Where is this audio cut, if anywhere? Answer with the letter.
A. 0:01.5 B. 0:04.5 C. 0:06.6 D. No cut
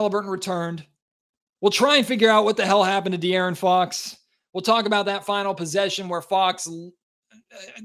A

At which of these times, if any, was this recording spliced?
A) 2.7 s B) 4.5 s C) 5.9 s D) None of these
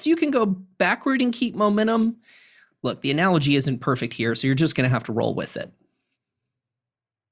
D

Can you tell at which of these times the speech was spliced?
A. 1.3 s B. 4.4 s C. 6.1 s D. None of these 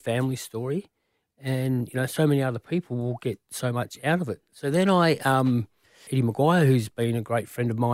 C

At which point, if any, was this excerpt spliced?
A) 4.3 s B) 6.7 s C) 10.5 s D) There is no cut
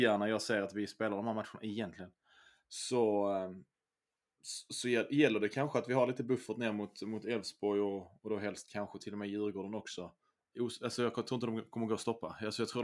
C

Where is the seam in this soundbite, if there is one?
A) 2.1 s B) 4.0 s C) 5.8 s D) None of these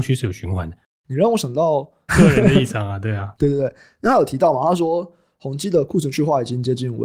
A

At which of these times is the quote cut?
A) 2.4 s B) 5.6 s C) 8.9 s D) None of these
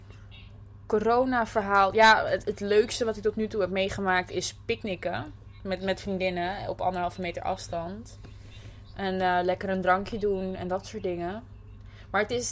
A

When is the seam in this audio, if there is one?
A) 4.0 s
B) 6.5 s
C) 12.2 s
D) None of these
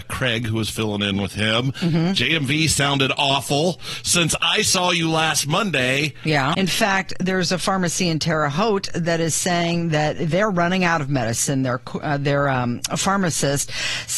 B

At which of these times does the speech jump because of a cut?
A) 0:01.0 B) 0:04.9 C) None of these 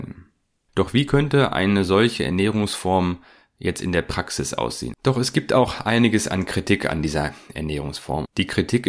B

